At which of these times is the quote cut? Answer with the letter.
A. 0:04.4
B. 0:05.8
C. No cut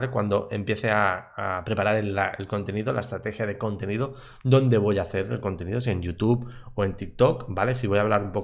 C